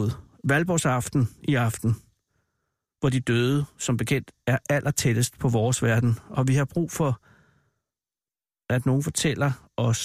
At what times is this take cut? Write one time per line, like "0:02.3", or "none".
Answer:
none